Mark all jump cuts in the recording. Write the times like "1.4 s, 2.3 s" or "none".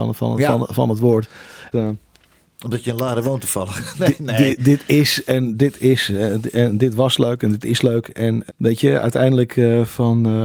1.7 s, 8.5 s